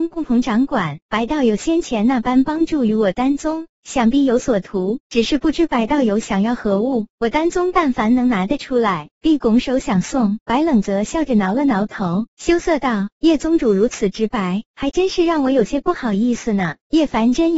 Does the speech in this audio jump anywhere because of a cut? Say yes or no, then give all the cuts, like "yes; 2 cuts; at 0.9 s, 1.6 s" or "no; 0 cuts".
yes; 1 cut; at 1.0 s